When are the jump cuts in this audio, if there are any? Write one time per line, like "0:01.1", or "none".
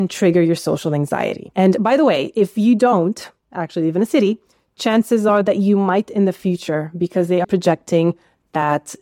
0:01.5
0:07.4